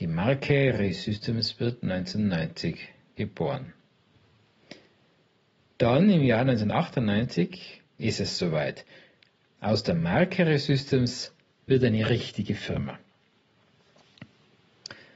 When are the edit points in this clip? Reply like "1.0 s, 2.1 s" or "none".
none